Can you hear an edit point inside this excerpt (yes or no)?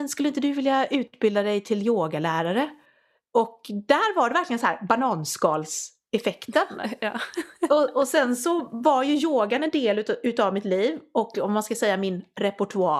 no